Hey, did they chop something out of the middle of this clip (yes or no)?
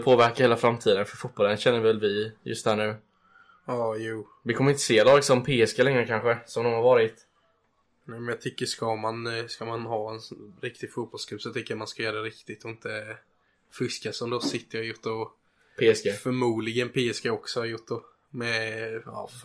no